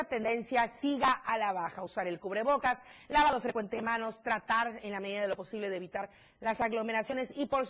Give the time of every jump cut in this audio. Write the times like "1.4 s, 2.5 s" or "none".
none